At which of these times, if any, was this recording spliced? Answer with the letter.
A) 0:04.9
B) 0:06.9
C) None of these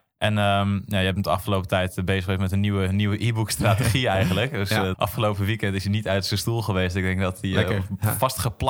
A